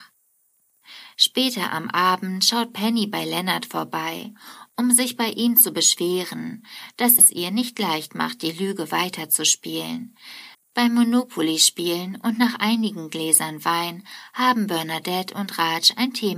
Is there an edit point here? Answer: yes; 2 cuts; at 7.2 s, 10.5 s

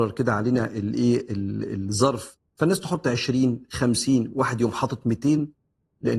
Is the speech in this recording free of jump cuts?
yes; 0 cuts

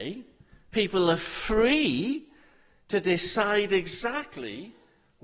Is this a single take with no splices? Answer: yes; 0 cuts

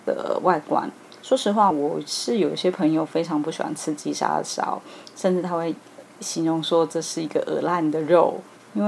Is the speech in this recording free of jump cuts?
yes; 0 cuts

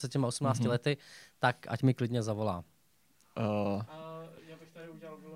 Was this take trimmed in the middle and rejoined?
no; 0 cuts

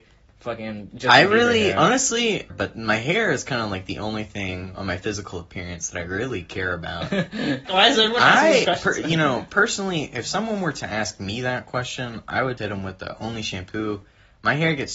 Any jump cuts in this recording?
yes; 3 cuts; at 2.5 s, 7.7 s, 12.6 s

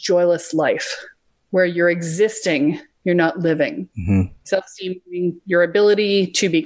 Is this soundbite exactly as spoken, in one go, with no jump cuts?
no; 1 cut; at 4.4 s

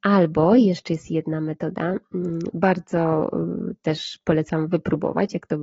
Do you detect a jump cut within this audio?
no; 0 cuts

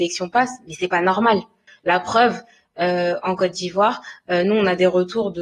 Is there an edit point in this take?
yes; 1 cut; at 1.7 s

